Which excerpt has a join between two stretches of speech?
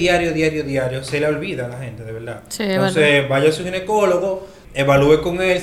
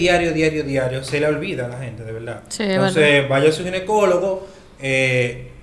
first; 1 cut; at 4.6 s

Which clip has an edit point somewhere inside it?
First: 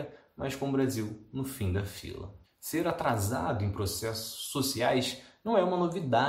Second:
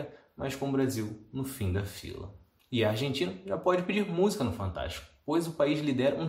first; 1 cut; at 2.4 s

